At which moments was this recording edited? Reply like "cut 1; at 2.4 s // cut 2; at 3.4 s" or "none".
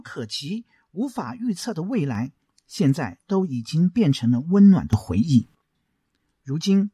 none